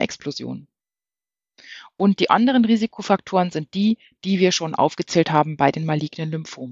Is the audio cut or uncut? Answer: uncut